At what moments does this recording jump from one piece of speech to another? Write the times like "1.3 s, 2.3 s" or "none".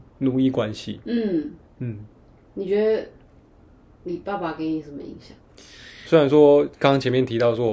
6.0 s